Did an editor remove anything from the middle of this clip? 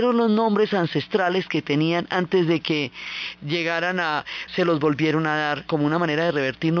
yes; 2 cuts; at 4.5 s, 5.7 s

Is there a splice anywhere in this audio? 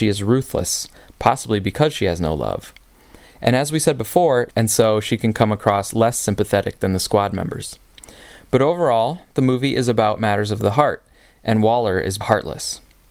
yes; 2 cuts; at 4.5 s, 12.2 s

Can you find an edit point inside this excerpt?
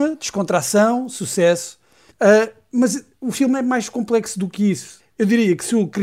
yes; 2 cuts; at 2.1 s, 5.0 s

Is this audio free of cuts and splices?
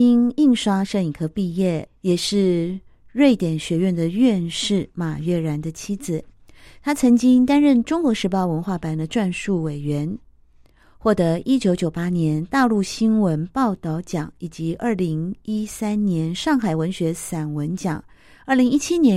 no; 1 cut; at 1.9 s

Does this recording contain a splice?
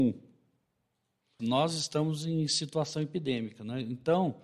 yes; 1 cut; at 1.4 s

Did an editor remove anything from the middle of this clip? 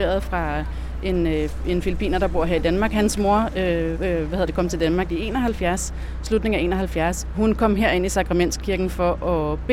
yes; 2 cuts; at 3.9 s, 7.3 s

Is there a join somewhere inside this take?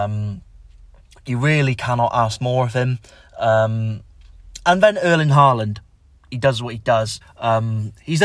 yes; 1 cut; at 7.2 s

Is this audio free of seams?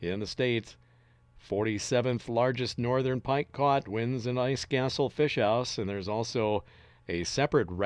yes; 0 cuts

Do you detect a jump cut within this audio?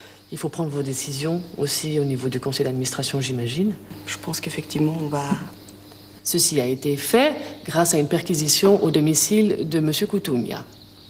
yes; 1 cut; at 6.2 s

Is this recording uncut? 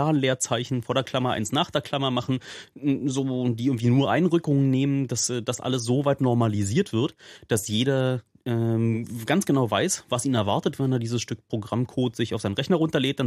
yes; 0 cuts

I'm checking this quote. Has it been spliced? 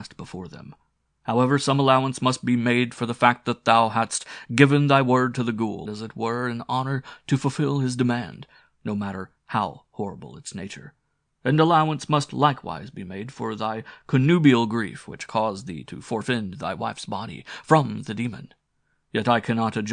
yes; 1 cut; at 5.9 s

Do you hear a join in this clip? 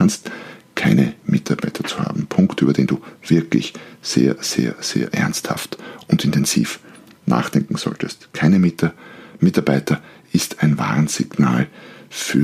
no; 0 cuts

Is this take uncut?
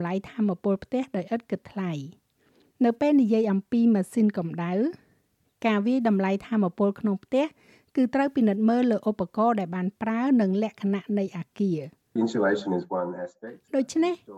no; 1 cut; at 12.2 s

